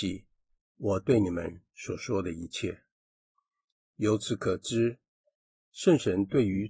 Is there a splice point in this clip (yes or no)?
no